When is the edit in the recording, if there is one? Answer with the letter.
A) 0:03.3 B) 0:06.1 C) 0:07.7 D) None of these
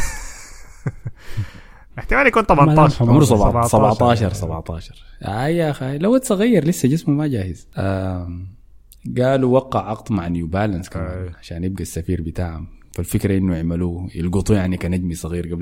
C